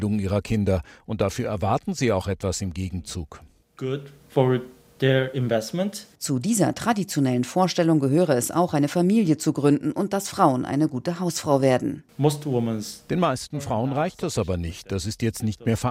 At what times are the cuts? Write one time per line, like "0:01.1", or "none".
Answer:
none